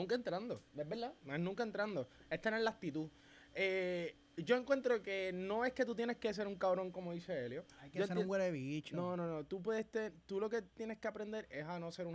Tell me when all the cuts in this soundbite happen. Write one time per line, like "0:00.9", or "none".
none